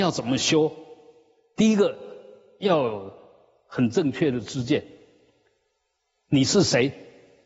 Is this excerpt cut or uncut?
uncut